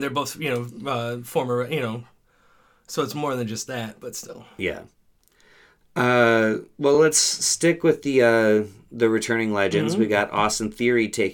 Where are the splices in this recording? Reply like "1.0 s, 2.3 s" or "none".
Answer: none